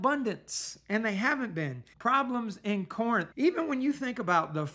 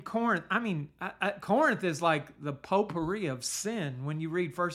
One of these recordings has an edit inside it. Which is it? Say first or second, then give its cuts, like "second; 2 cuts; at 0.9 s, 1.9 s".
first; 2 cuts; at 1.9 s, 3.3 s